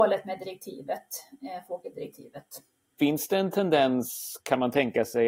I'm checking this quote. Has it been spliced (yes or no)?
yes